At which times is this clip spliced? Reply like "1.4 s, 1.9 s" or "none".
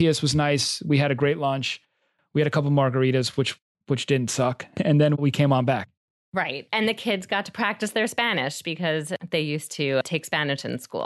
none